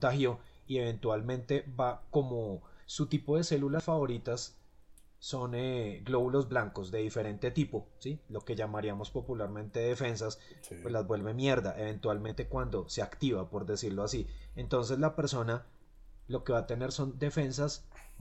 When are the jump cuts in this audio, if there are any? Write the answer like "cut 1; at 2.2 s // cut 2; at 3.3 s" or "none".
none